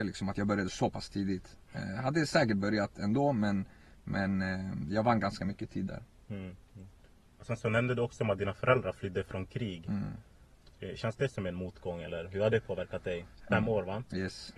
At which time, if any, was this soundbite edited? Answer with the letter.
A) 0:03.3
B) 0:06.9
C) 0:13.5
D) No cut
C